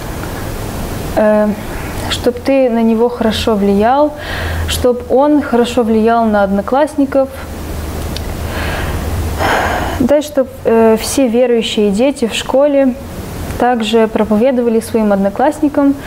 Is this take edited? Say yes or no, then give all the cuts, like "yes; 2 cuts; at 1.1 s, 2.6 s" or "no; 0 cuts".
no; 0 cuts